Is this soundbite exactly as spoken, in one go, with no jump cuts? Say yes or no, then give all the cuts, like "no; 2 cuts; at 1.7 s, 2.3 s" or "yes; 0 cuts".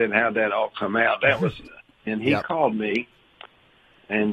no; 1 cut; at 2.1 s